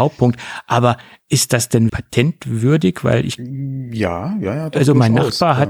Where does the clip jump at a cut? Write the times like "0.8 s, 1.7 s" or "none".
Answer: 1.9 s

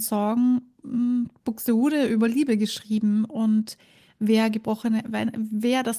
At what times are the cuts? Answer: 1.4 s

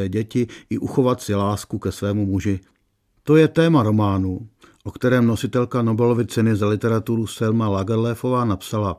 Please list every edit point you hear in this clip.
none

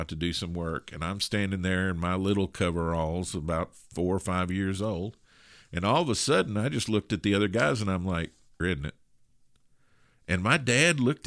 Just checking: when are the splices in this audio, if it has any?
8.6 s

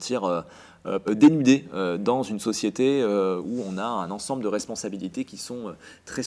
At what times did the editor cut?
1.1 s

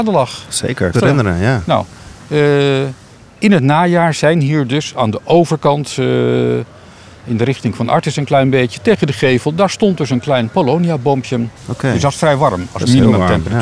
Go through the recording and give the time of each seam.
0.9 s, 11.6 s

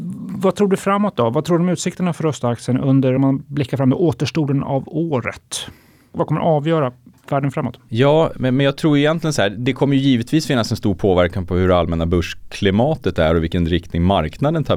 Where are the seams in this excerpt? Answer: none

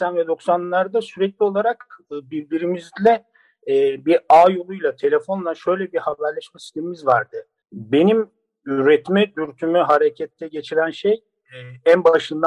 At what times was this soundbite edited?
7.6 s

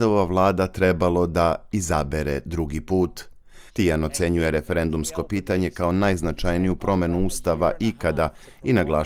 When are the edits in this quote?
3.7 s

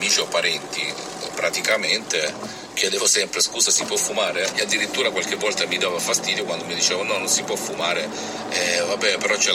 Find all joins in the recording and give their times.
4.5 s

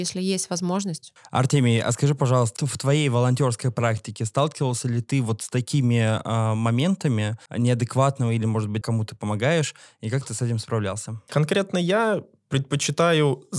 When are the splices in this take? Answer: 7.5 s, 8.8 s, 11.3 s

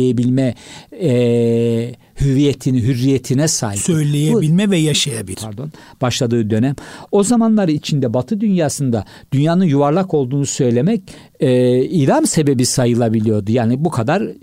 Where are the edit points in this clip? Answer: 5.3 s

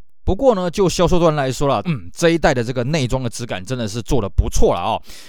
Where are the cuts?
1.8 s

